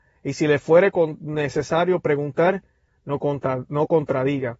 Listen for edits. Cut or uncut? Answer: cut